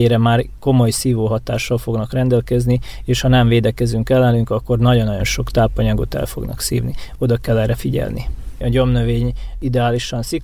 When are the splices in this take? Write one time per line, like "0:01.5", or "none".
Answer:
0:08.6